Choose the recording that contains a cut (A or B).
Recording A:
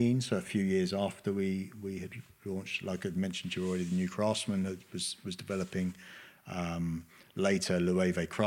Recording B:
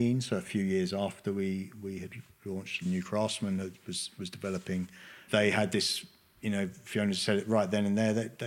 B